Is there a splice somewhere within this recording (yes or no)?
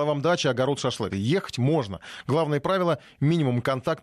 yes